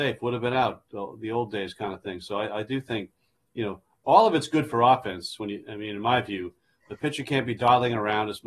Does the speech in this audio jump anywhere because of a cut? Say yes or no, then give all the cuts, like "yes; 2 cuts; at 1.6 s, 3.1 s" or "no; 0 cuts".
no; 0 cuts